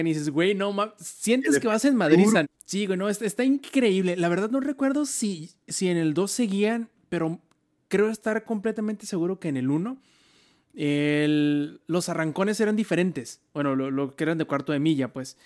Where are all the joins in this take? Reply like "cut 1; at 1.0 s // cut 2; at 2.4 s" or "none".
cut 1; at 2.4 s